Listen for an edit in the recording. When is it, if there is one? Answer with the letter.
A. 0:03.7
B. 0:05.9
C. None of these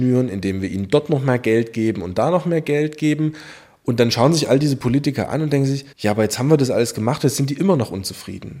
B